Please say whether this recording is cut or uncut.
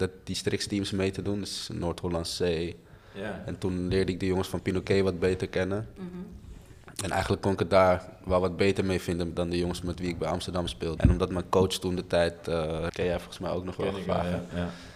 cut